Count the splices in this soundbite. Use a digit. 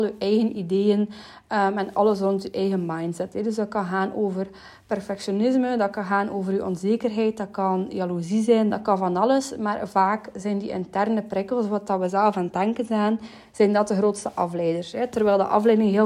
1